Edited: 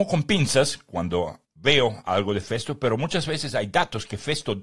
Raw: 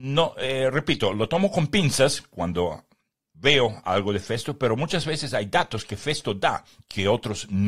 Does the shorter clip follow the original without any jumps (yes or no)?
no